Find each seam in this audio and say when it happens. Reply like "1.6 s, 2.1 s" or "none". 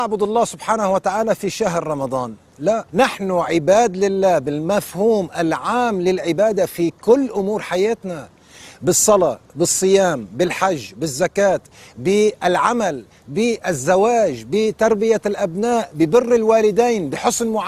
2.9 s